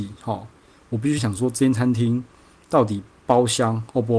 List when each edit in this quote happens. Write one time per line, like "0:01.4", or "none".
0:01.2